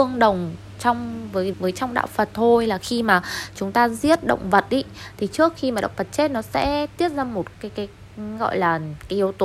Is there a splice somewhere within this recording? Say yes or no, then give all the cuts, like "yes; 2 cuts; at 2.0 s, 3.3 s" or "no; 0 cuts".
yes; 2 cuts; at 1.5 s, 7.5 s